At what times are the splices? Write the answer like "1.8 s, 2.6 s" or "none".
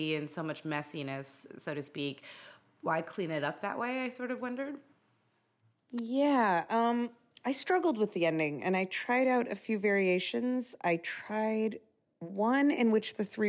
none

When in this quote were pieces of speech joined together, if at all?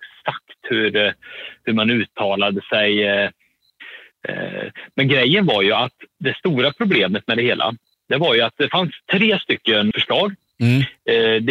6.1 s, 9.9 s

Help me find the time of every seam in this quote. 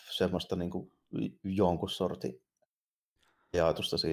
none

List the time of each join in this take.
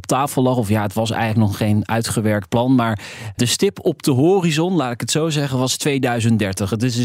none

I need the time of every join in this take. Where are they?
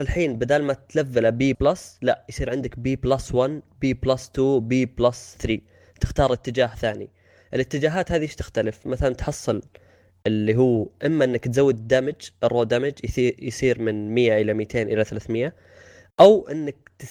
1.5 s

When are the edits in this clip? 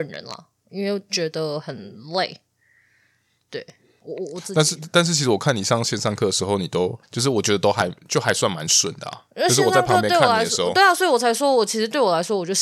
9.3 s

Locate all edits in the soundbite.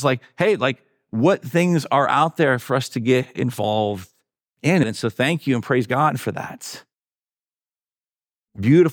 4.8 s

